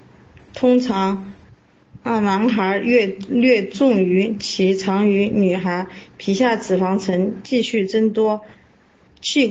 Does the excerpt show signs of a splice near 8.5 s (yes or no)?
no